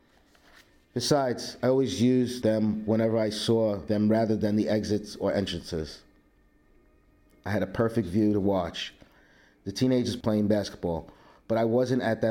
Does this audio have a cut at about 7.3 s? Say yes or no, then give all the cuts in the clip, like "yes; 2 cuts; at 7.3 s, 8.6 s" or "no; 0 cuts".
yes; 1 cut; at 7.3 s